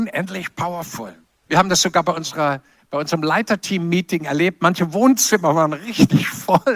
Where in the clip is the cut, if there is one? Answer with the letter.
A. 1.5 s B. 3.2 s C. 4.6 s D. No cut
A